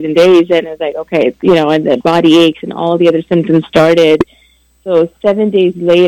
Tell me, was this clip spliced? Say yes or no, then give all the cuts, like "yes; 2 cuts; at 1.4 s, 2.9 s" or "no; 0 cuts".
no; 0 cuts